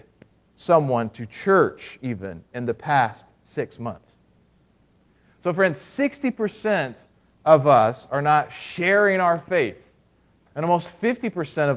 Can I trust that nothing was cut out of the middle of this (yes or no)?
yes